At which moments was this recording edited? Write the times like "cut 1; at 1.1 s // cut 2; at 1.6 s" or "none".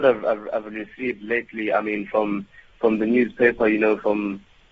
none